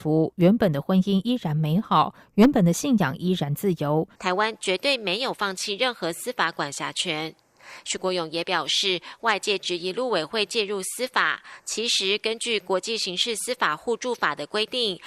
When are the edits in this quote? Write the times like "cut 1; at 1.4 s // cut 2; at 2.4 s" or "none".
cut 1; at 4.2 s